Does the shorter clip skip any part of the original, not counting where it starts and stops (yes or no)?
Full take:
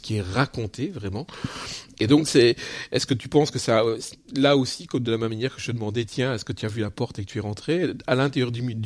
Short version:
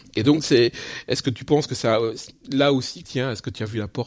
yes